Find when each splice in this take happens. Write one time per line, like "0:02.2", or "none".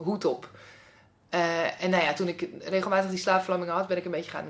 none